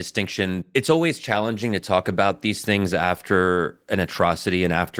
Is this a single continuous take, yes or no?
yes